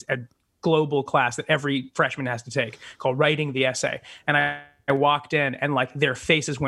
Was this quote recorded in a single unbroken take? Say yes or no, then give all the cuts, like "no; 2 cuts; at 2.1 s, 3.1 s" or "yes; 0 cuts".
yes; 0 cuts